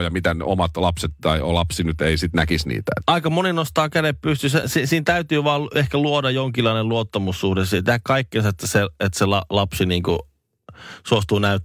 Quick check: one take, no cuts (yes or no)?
yes